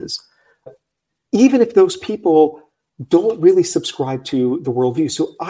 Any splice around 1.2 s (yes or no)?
no